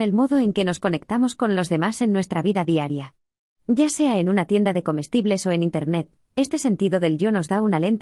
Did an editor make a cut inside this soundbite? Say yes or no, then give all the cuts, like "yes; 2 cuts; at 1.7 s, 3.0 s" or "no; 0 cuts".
no; 0 cuts